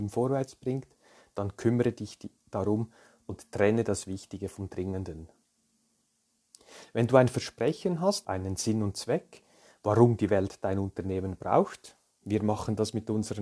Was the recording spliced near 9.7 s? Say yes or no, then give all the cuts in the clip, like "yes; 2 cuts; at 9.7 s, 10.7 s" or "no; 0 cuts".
no; 1 cut; at 8.2 s